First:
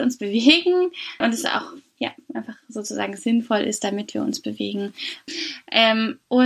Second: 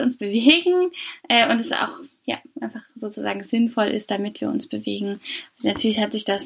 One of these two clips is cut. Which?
first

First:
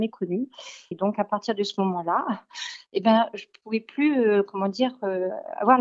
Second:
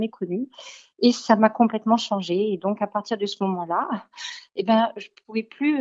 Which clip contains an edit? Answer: first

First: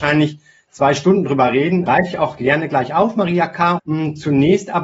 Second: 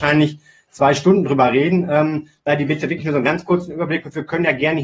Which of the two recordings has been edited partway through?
first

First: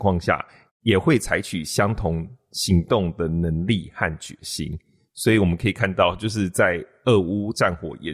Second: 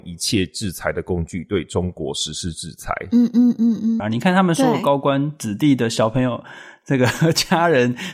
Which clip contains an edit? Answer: second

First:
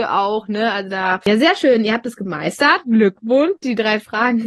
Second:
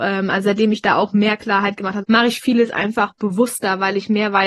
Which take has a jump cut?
second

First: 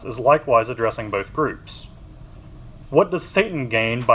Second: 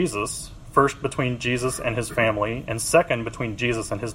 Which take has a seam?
first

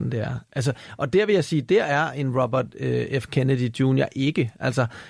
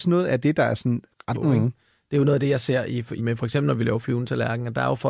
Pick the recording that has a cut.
second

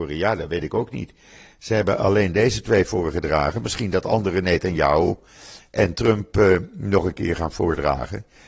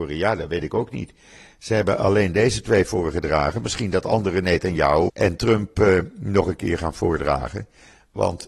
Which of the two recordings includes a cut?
second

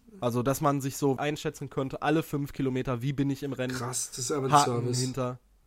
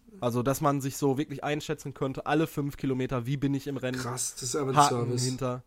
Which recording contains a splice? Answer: first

